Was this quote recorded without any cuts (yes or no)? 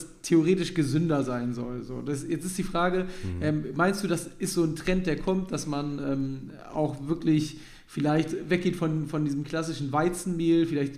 yes